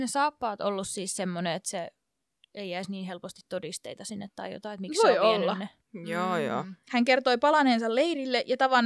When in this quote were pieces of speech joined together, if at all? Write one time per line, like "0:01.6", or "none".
0:05.8